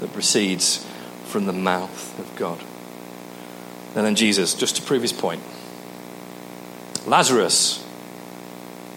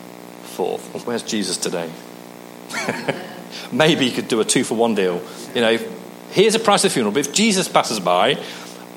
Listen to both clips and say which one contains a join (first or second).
second